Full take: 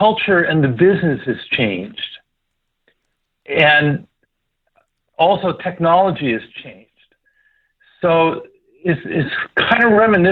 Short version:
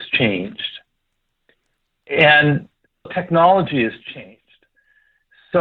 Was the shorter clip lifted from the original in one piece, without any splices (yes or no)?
no